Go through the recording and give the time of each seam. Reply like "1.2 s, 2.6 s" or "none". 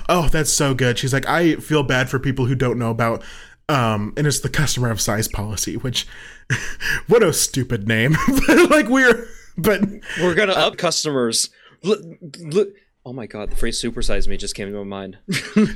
10.7 s